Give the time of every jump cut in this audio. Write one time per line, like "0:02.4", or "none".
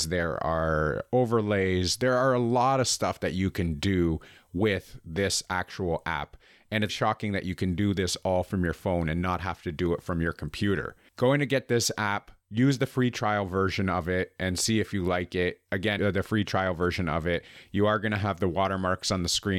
0:06.9
0:16.0